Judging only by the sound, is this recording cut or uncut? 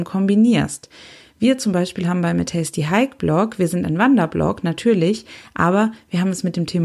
uncut